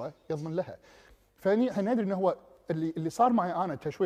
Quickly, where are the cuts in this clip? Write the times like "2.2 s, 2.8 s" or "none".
none